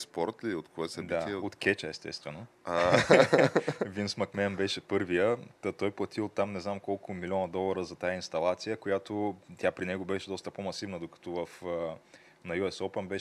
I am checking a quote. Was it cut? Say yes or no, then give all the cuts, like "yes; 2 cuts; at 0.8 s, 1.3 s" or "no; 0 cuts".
no; 0 cuts